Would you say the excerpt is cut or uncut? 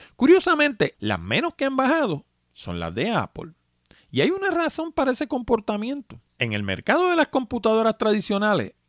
cut